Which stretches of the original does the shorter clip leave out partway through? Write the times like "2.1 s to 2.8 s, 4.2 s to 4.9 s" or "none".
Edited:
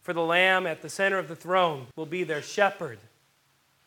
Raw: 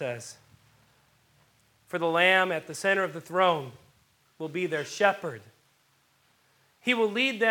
3.8 s to 4.3 s